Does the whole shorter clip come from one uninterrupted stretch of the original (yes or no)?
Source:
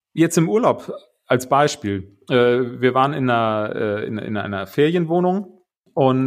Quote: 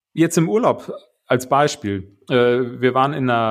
yes